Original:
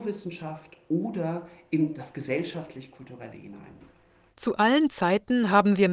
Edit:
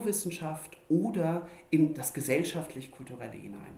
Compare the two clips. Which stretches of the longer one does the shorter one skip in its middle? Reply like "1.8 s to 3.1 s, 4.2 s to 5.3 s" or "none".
none